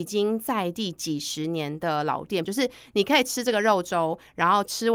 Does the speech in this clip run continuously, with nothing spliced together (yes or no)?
no